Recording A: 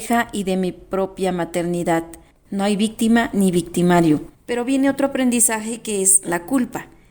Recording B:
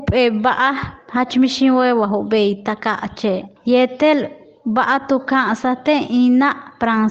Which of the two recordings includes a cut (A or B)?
A